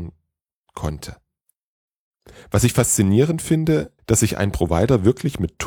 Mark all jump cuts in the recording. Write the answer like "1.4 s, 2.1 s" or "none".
4.0 s